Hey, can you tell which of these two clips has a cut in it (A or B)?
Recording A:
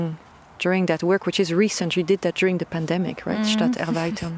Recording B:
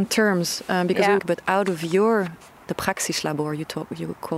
B